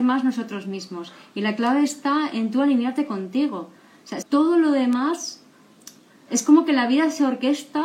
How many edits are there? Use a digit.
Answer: 1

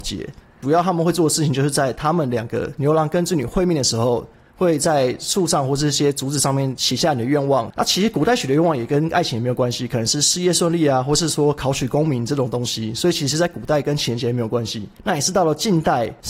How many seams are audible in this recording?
0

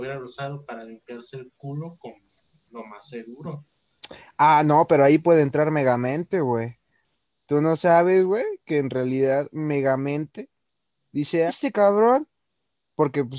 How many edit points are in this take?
1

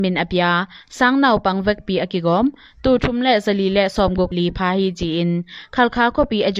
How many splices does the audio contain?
1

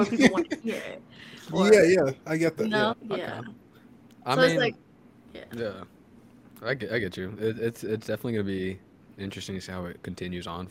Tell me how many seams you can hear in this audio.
1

